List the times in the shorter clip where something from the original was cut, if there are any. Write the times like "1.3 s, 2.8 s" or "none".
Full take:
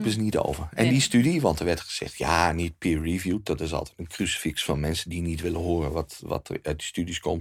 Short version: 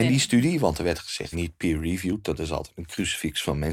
1.3 s